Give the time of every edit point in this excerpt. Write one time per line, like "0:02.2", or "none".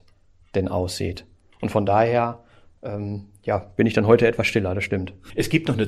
none